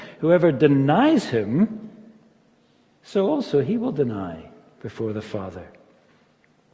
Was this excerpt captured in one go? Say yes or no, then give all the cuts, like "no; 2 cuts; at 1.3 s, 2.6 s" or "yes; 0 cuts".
yes; 0 cuts